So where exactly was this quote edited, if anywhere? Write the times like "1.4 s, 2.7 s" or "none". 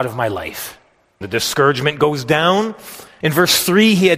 1.2 s, 3.2 s

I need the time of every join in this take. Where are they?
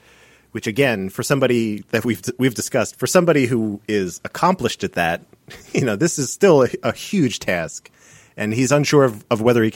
none

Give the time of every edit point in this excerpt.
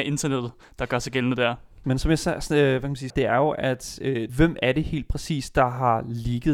1.8 s, 3.1 s, 4.3 s

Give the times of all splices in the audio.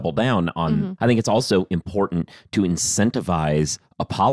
1.0 s

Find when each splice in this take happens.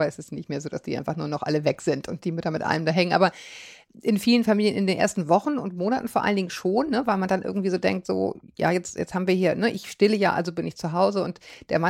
none

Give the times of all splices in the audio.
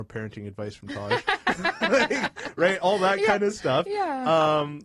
none

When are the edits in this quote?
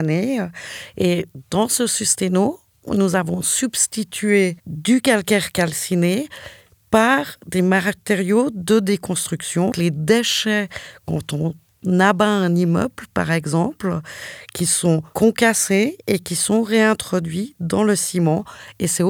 9.7 s

